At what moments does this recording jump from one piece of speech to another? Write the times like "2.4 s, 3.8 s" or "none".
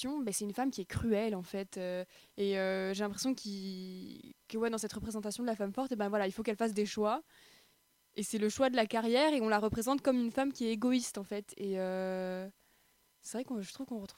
2.2 s